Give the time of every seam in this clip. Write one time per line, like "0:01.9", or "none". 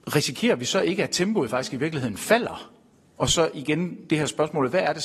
0:03.2